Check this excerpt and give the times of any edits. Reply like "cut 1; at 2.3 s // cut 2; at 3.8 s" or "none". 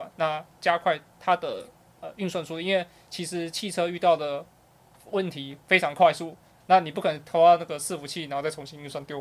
cut 1; at 1.1 s